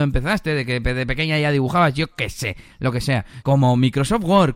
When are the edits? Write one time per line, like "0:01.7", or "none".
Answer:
0:03.4

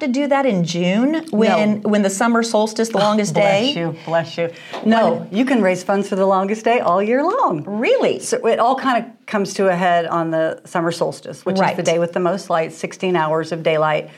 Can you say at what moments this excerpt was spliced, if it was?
none

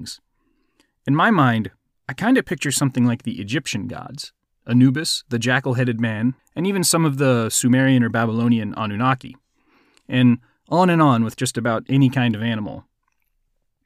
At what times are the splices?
0:06.4

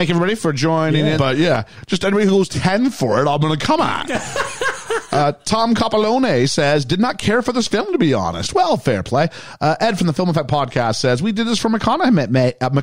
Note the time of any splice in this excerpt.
0:01.2

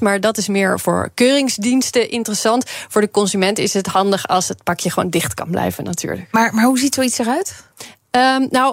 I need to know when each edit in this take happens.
none

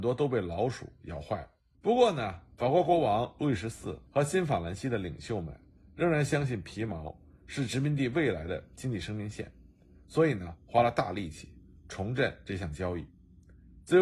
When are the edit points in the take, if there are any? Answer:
0:01.7
0:04.1

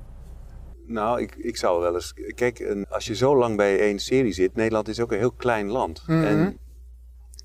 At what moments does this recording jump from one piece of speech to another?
0:02.8

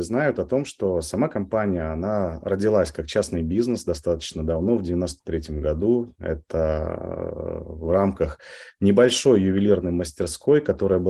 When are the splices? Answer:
none

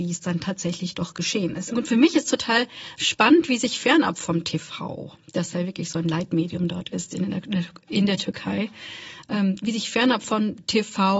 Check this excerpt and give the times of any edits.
0:01.7

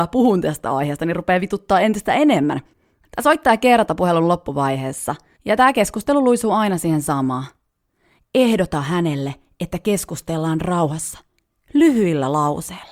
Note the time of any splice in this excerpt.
0:05.4
0:08.2

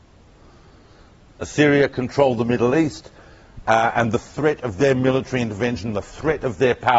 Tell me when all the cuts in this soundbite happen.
0:01.3

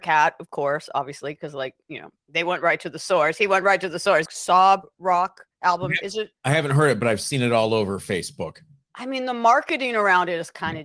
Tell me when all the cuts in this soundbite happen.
0:04.3
0:06.4

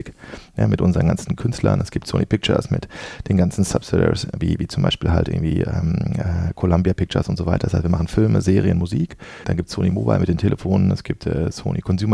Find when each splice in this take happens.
0:09.4

